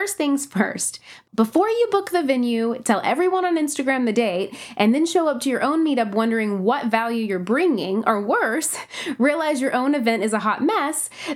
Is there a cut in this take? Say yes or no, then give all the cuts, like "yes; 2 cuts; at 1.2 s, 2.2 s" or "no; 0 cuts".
no; 0 cuts